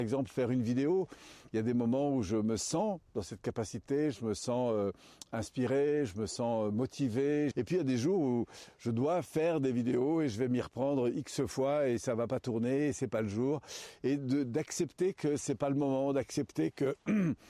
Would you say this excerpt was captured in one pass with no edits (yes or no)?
no